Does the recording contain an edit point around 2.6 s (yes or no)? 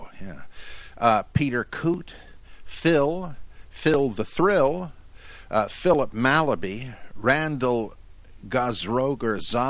no